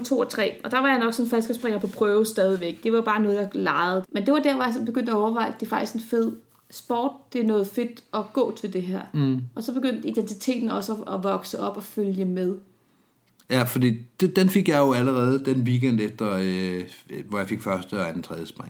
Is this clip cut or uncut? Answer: cut